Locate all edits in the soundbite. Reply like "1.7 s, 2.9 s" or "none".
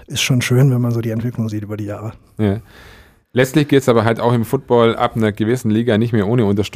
none